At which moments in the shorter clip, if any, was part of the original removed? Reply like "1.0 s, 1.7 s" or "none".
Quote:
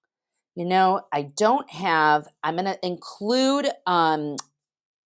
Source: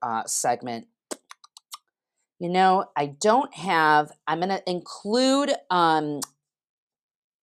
none